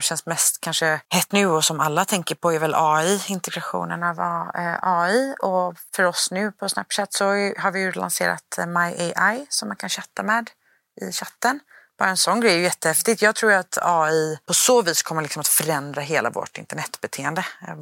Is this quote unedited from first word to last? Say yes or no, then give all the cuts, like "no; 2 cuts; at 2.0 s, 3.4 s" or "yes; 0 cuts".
no; 1 cut; at 1.3 s